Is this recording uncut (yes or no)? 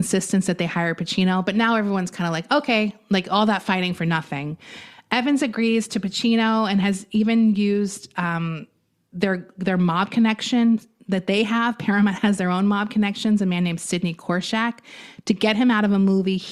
yes